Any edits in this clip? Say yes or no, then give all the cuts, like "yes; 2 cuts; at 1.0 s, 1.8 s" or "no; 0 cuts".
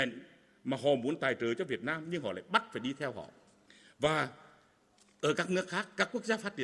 no; 0 cuts